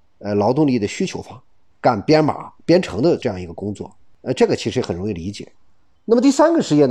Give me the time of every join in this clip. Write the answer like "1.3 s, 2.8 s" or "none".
1.7 s